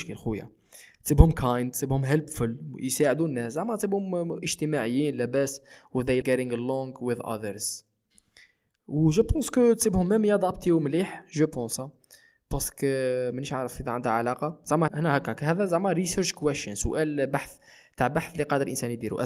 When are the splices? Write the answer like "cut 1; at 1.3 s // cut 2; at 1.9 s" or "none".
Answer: cut 1; at 6.2 s // cut 2; at 14.9 s